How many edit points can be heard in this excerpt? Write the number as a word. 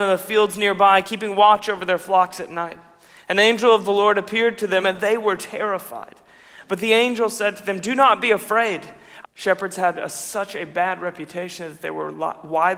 two